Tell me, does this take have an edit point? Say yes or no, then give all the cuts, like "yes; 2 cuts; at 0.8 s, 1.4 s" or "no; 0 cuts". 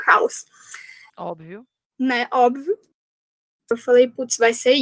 yes; 2 cuts; at 1.1 s, 3.7 s